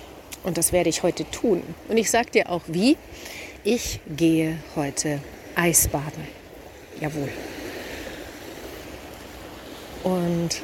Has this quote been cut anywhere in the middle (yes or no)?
no